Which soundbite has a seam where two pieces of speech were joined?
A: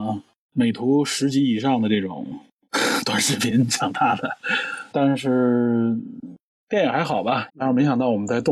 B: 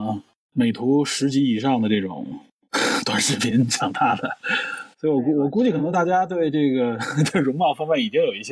A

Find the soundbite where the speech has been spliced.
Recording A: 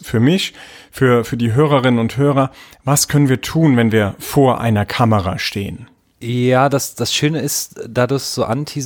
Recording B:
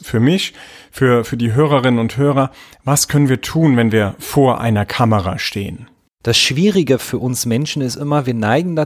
B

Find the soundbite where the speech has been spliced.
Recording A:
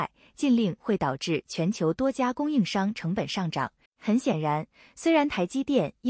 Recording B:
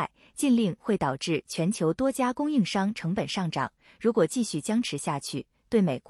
A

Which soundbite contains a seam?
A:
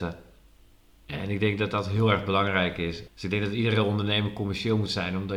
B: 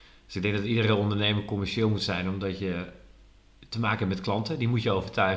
A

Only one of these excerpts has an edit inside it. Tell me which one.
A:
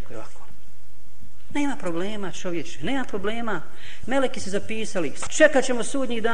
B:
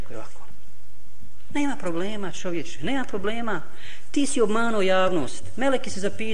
A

